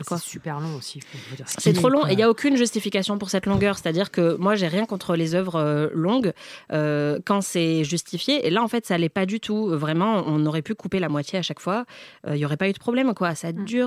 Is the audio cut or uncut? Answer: uncut